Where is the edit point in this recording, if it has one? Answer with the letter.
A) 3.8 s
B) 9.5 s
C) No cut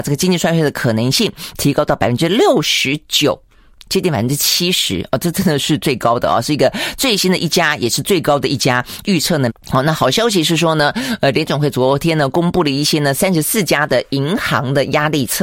B